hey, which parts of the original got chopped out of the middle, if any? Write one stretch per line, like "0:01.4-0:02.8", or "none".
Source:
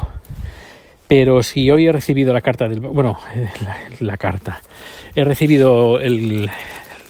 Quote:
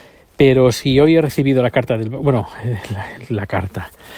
none